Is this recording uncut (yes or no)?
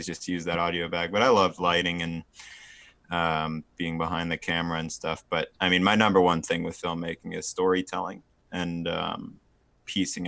yes